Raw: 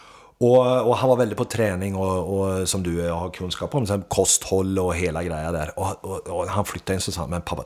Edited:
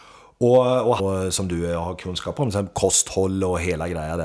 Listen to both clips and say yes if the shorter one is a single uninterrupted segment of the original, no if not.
no